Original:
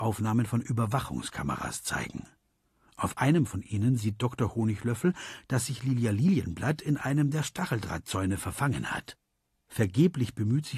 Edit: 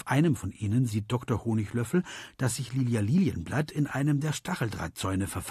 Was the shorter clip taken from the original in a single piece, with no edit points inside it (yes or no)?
yes